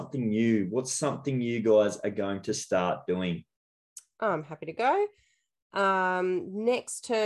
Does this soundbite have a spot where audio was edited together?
no; 0 cuts

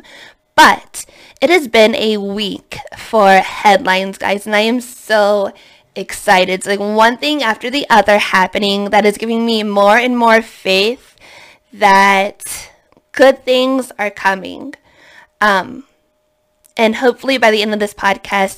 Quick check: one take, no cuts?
yes; 0 cuts

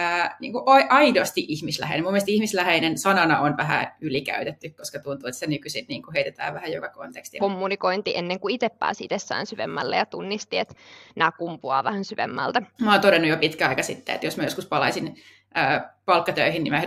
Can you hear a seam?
yes; 2 cuts; at 7.4 s, 12.8 s

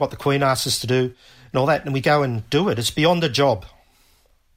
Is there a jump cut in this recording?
yes; 1 cut; at 2.0 s

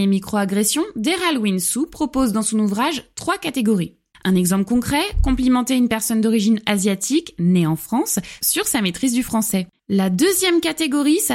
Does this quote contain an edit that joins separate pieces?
yes; 2 cuts; at 4.1 s, 9.7 s

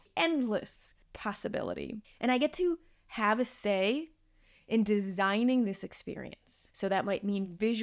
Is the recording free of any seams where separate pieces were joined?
no; 2 cuts; at 1.0 s, 6.7 s

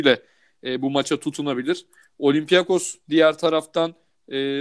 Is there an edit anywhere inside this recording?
no; 0 cuts

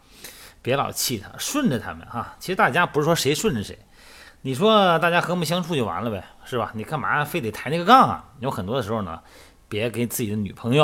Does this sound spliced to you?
no; 0 cuts

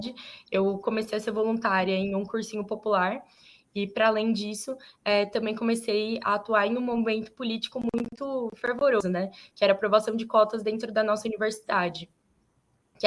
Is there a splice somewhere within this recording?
yes; 1 cut; at 6.2 s

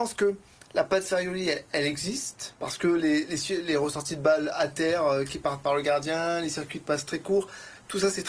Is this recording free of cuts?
yes; 0 cuts

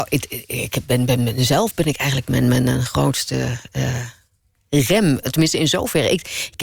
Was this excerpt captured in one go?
yes; 0 cuts

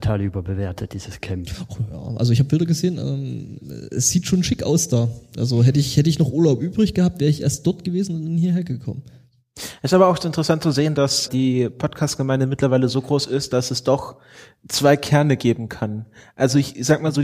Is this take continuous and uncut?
no; 1 cut; at 11.3 s

